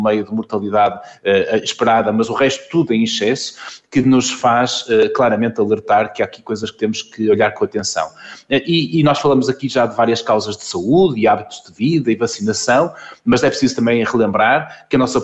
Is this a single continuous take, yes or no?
yes